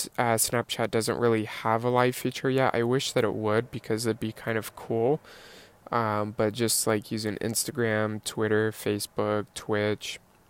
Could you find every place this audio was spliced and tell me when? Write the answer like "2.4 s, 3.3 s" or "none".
none